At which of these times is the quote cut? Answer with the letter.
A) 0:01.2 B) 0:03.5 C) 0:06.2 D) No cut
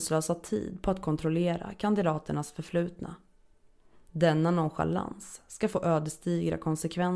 D